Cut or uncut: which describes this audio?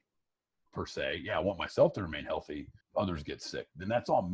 cut